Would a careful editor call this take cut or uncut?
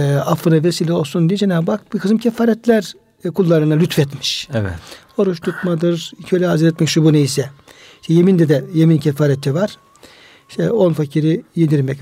uncut